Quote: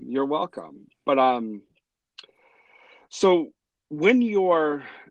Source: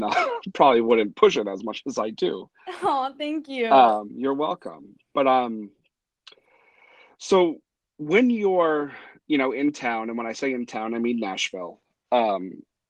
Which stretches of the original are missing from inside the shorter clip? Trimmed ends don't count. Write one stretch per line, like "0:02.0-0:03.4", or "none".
none